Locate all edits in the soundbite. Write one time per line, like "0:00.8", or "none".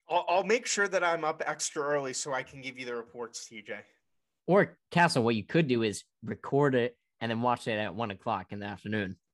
none